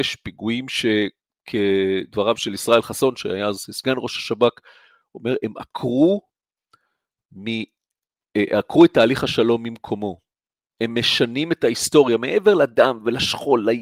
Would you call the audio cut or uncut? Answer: uncut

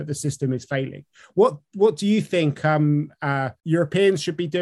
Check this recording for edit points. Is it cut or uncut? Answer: uncut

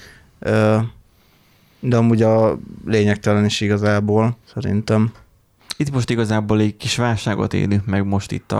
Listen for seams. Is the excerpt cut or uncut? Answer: cut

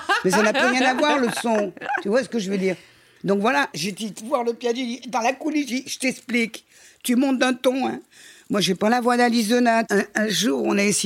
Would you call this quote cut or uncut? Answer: cut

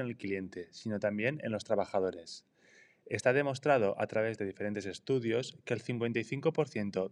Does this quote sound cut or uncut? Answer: uncut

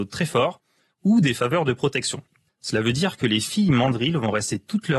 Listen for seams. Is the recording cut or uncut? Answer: cut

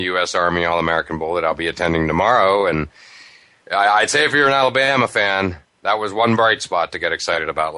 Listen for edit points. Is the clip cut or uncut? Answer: uncut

